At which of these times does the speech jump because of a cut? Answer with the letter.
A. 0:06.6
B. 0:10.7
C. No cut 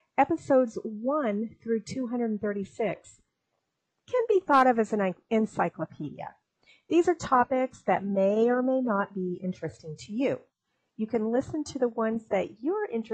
C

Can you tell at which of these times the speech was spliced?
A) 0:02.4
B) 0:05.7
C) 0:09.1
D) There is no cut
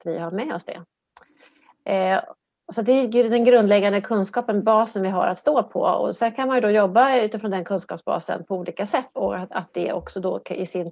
C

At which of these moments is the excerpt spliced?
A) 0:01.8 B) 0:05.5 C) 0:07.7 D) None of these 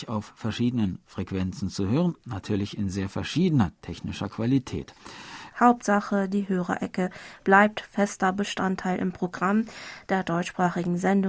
B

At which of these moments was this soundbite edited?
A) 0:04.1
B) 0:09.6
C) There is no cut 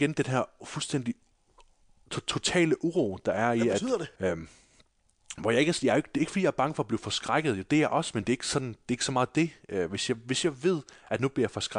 A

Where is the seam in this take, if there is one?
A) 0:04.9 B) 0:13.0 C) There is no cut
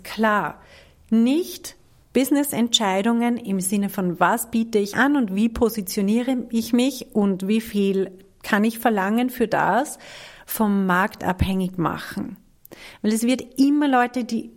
A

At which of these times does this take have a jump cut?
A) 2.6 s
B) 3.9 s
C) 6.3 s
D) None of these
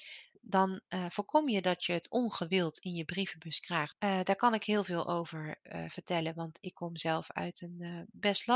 B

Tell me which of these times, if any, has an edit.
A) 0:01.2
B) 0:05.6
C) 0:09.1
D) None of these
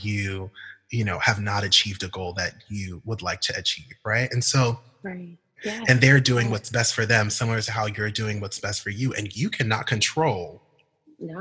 B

